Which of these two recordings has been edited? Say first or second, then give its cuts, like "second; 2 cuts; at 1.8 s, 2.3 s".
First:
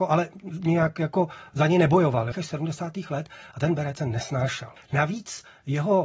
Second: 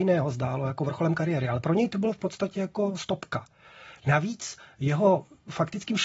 first; 2 cuts; at 2.3 s, 4.8 s